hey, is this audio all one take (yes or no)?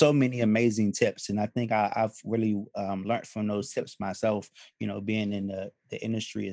yes